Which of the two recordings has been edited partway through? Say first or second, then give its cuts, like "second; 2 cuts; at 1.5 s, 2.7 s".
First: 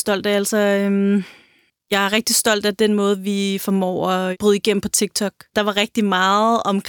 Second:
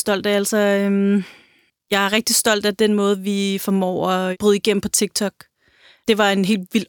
first; 1 cut; at 5.5 s